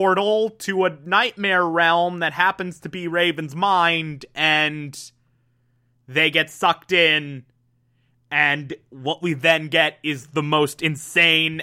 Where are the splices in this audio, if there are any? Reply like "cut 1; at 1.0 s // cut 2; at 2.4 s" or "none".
none